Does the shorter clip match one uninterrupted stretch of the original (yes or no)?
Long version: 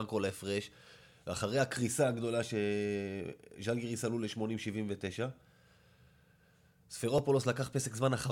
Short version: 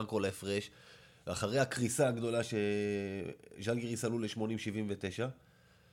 yes